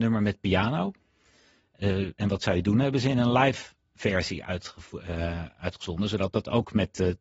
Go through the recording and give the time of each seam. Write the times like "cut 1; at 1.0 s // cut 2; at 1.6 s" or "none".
cut 1; at 2.1 s